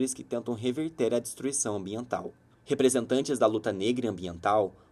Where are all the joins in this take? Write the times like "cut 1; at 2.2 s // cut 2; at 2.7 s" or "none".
cut 1; at 2.5 s